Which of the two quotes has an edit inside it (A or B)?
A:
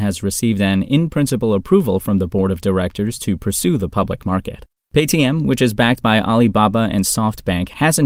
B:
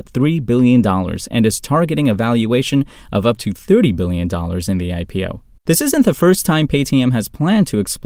B